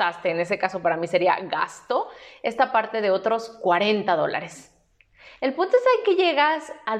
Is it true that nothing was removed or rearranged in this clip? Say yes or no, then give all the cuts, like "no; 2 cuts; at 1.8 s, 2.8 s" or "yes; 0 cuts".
yes; 0 cuts